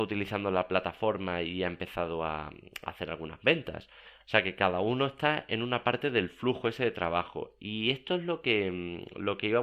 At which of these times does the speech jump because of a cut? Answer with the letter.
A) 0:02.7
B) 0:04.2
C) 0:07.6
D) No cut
D